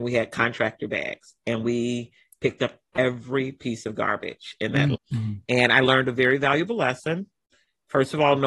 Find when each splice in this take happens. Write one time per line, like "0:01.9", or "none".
0:04.9

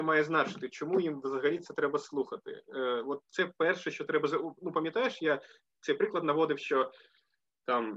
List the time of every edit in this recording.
none

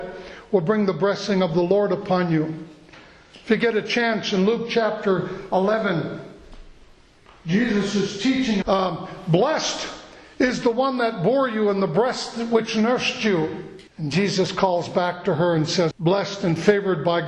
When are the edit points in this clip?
0:08.6
0:13.9
0:15.9

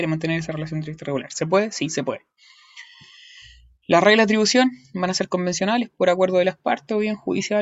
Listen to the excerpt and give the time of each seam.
none

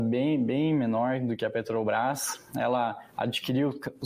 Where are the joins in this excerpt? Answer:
none

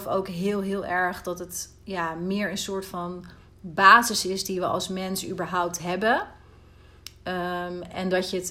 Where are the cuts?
none

